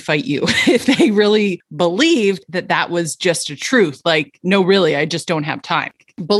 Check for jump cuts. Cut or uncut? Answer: uncut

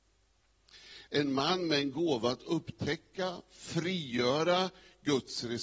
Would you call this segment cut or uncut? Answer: cut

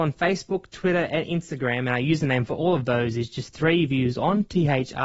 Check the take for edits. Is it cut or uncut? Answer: uncut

